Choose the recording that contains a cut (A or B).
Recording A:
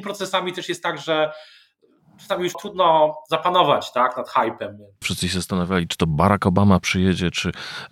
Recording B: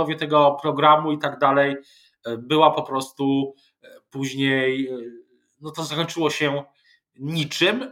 A